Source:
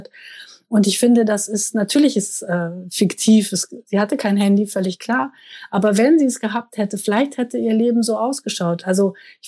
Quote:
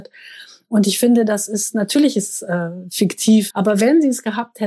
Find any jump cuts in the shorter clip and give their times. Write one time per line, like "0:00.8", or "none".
0:03.5